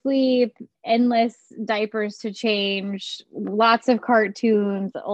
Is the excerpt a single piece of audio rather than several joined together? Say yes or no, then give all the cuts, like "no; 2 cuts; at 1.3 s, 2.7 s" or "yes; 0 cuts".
yes; 0 cuts